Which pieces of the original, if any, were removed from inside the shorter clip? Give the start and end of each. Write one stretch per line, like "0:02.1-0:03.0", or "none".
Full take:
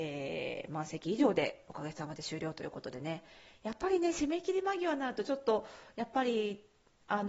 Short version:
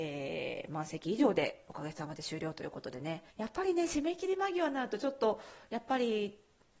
0:03.3-0:03.6